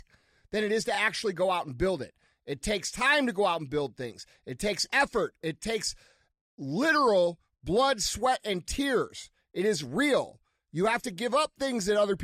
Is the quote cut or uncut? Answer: uncut